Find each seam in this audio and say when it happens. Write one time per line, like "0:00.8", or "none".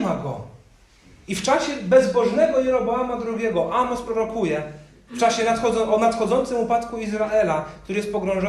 none